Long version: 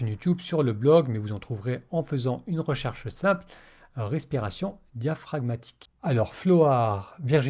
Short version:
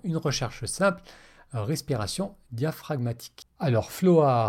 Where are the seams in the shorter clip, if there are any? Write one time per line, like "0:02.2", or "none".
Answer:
none